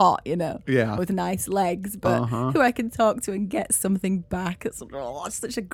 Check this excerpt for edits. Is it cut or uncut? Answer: uncut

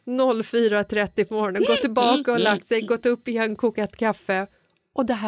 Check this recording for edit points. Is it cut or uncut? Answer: uncut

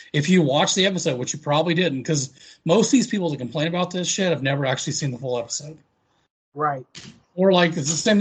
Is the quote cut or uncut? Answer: uncut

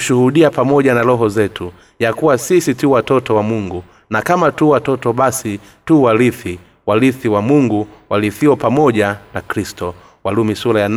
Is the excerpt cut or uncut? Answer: uncut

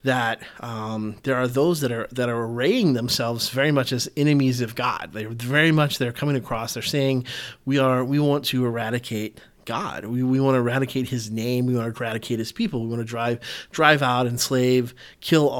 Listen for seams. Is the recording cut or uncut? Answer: uncut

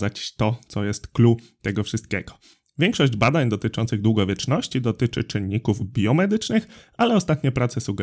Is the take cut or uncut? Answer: uncut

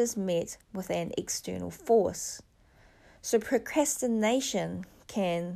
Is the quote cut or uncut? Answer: uncut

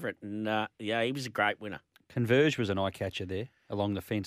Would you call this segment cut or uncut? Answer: uncut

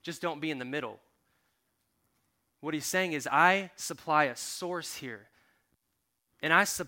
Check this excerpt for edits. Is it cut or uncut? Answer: uncut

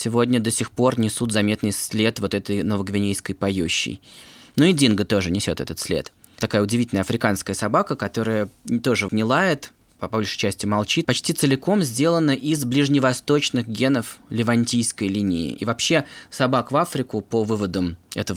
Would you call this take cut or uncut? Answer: cut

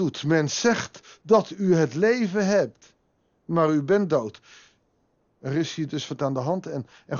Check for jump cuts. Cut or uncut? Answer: cut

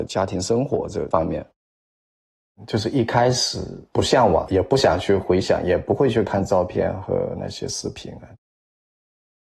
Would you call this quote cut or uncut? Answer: uncut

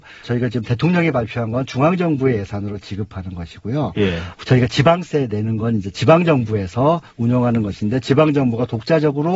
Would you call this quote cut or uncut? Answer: uncut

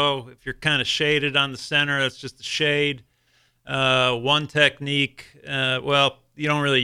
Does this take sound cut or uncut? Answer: uncut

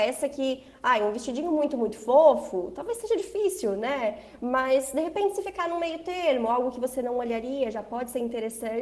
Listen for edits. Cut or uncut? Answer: uncut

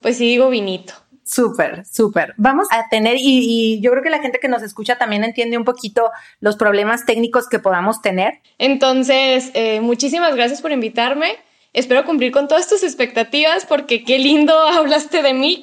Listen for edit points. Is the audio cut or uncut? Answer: cut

